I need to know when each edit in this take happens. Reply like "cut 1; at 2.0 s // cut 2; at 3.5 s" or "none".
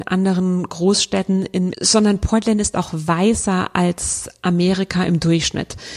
cut 1; at 1.7 s

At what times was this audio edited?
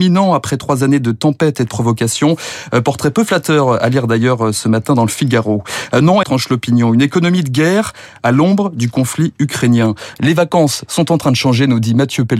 cut 1; at 6.2 s // cut 2; at 10.1 s

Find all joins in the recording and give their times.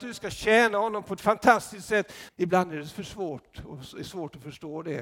cut 1; at 2.3 s

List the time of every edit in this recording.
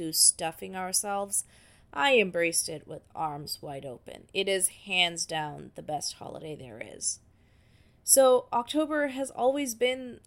none

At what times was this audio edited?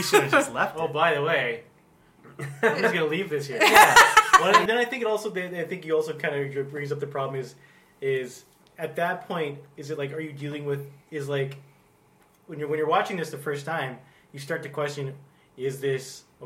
cut 1; at 4.7 s // cut 2; at 11.0 s

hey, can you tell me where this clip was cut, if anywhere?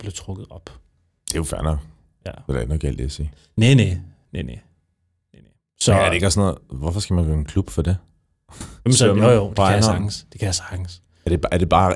cut 1; at 8.9 s

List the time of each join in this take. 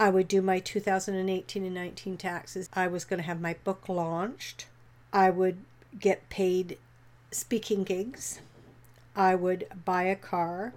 cut 1; at 2.7 s

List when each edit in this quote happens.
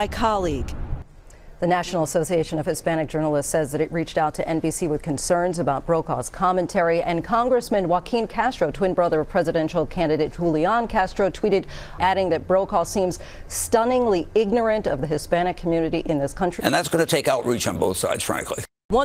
cut 1; at 12.0 s // cut 2; at 16.6 s

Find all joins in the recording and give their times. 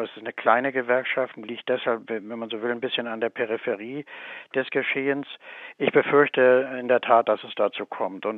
none

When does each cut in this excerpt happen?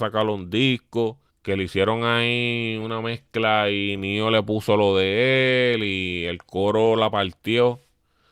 cut 1; at 1.3 s

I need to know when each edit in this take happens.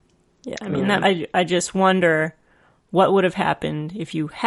cut 1; at 1.0 s

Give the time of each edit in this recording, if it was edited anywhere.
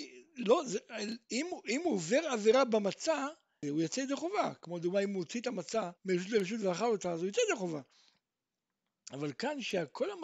cut 1; at 3.6 s // cut 2; at 6.0 s

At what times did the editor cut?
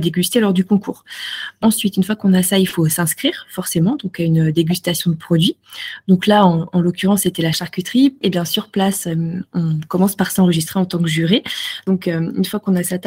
cut 1; at 8.2 s

